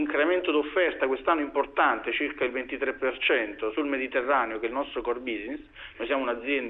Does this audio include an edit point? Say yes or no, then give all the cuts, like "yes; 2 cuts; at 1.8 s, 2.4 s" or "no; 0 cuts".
no; 0 cuts